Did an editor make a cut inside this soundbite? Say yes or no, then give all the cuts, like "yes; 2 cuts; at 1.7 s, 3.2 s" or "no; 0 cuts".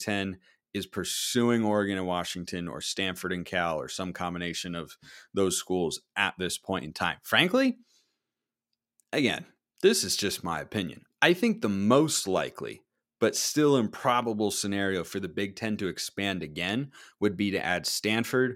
no; 0 cuts